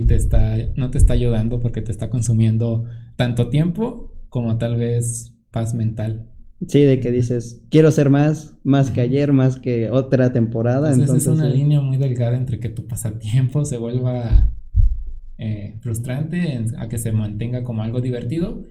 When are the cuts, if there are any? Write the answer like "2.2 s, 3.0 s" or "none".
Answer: none